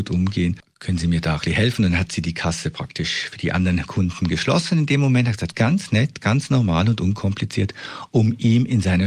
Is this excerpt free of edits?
no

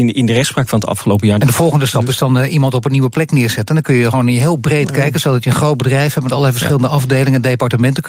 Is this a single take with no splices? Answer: no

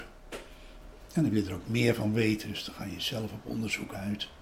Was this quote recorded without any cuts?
yes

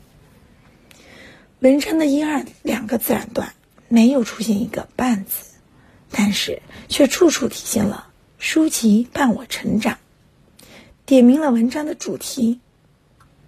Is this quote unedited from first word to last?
yes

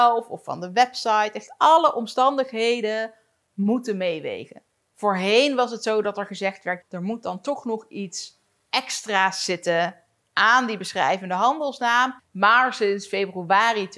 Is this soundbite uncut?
no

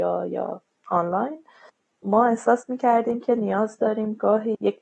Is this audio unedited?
yes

